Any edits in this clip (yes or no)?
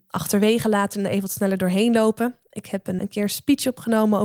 yes